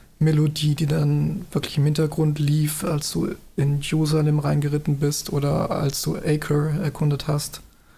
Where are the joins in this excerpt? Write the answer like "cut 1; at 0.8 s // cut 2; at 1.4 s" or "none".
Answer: none

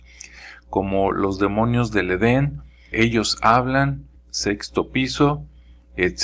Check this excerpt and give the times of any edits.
cut 1; at 2.9 s // cut 2; at 4.2 s

